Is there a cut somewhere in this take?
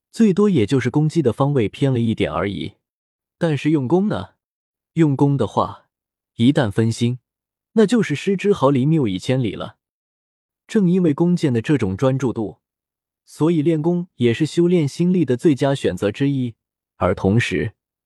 no; 0 cuts

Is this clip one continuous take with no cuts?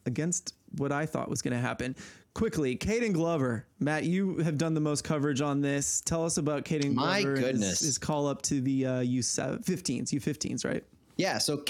yes; 0 cuts

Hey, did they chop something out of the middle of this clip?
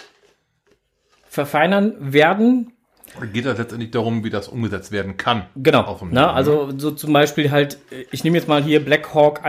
no; 0 cuts

